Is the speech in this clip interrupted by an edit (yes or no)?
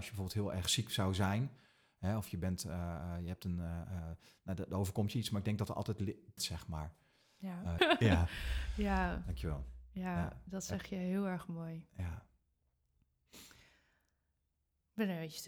yes